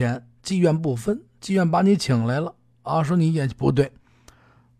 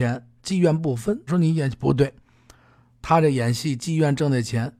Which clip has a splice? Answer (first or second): second